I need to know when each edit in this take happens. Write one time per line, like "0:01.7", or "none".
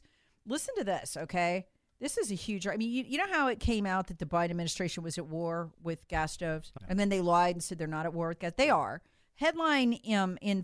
0:06.8